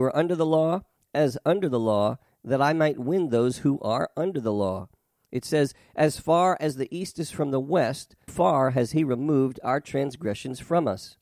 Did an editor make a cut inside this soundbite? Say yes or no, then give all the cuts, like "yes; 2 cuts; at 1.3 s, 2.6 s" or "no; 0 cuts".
yes; 2 cuts; at 5.3 s, 8.3 s